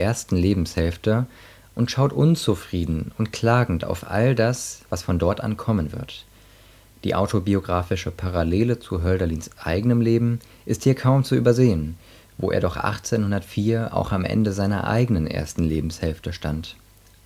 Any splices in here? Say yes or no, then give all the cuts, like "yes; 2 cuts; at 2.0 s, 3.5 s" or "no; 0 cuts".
no; 0 cuts